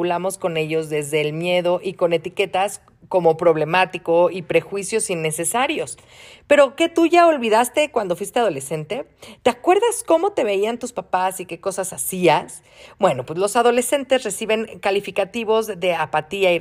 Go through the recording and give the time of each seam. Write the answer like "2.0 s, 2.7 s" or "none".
none